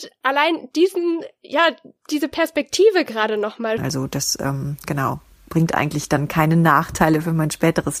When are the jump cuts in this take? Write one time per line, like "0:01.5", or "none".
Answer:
0:03.8